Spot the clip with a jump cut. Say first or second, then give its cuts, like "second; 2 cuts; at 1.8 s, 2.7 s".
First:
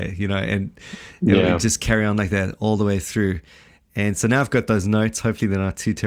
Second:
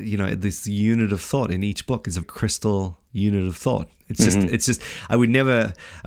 second; 1 cut; at 2.2 s